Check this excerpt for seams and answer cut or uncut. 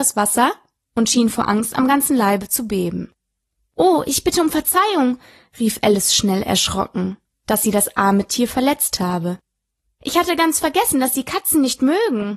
uncut